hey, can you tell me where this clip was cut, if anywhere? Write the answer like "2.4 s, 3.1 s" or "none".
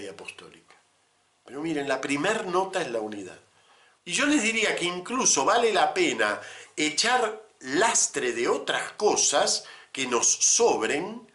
4.0 s